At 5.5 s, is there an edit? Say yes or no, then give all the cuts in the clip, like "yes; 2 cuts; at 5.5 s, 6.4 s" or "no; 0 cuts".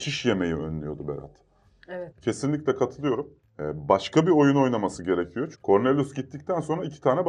yes; 2 cuts; at 2.1 s, 5.5 s